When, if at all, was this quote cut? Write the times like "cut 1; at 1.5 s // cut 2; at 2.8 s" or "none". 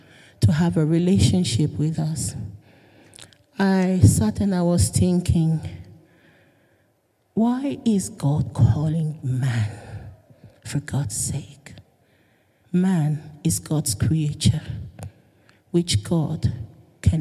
cut 1; at 12.6 s

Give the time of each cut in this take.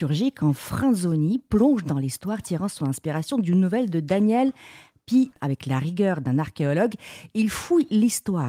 cut 1; at 5.3 s

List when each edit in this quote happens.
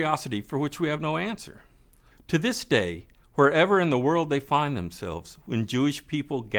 cut 1; at 2.1 s

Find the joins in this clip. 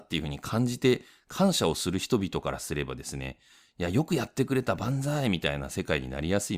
none

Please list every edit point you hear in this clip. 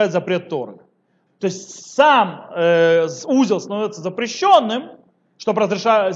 cut 1; at 1.3 s

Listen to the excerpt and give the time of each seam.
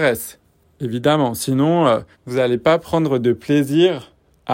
cut 1; at 2.1 s

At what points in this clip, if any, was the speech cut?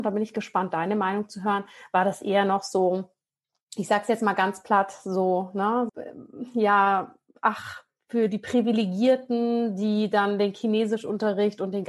cut 1; at 5.9 s

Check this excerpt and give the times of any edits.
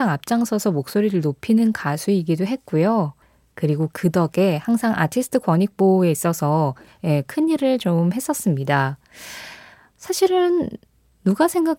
none

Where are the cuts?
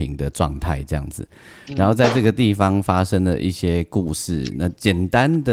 none

